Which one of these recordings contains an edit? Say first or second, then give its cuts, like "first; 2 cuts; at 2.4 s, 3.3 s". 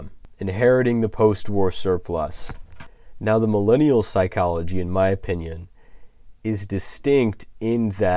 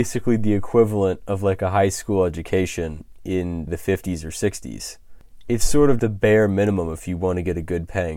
second; 2 cuts; at 3.7 s, 6.0 s